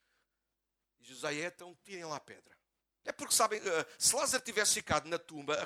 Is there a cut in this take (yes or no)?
yes